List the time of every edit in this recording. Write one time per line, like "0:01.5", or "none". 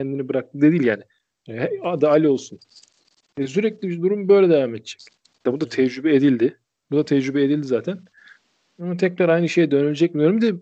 0:05.5